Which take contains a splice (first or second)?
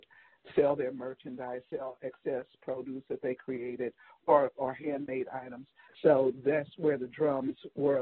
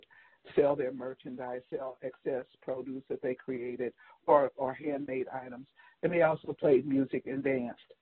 first